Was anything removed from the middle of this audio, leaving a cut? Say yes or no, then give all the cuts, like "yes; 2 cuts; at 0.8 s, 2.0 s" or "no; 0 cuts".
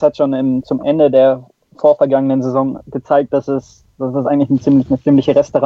no; 0 cuts